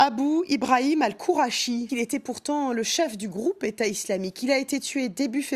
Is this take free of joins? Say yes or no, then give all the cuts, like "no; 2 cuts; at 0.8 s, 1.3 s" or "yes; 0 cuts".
no; 1 cut; at 1.9 s